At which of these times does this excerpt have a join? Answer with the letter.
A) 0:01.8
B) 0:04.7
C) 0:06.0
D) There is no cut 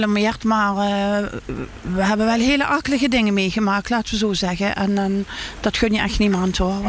D